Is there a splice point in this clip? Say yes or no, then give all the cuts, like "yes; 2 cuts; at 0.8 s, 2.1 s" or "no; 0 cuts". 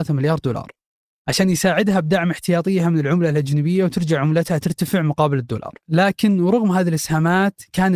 yes; 1 cut; at 5.8 s